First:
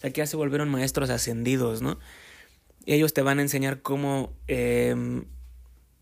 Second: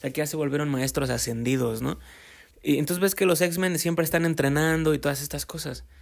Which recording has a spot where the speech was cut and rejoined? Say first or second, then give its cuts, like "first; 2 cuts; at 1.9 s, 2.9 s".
second; 1 cut; at 2.5 s